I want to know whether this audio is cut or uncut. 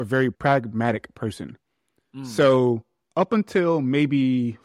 uncut